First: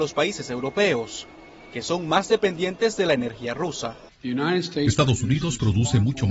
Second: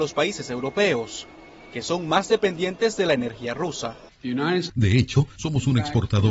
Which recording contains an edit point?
second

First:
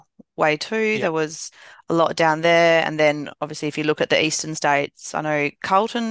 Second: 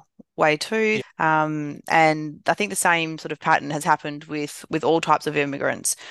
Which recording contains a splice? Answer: second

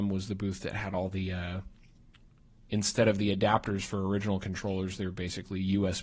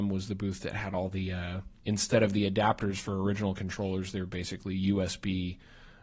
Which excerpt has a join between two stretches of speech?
second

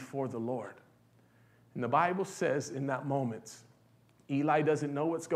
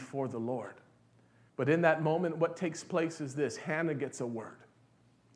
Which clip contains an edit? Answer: second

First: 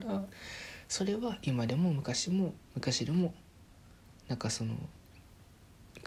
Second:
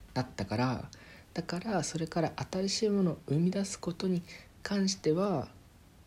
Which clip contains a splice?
first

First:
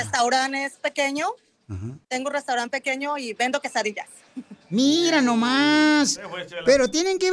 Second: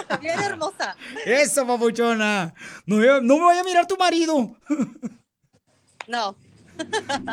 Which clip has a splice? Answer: first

